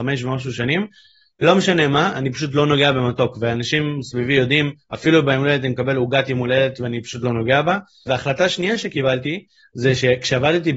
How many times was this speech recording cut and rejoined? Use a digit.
1